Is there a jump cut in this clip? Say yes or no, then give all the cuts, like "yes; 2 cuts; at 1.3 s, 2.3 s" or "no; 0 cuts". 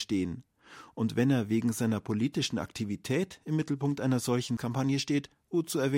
no; 0 cuts